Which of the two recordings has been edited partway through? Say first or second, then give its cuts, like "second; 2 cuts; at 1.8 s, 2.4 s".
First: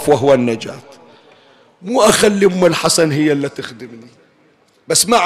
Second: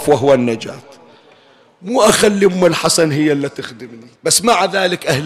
second; 1 cut; at 4.2 s